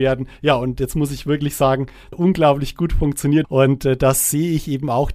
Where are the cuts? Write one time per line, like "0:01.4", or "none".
0:02.1
0:03.4